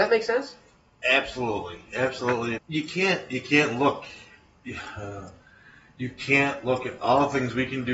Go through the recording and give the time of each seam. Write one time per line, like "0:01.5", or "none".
0:02.6